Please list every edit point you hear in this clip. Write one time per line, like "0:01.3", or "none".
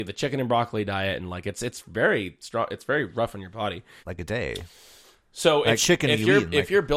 0:04.0
0:05.8